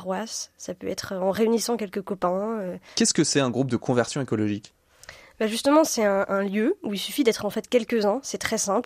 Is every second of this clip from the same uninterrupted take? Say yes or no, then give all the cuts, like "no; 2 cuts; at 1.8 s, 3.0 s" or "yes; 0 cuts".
no; 1 cut; at 2.9 s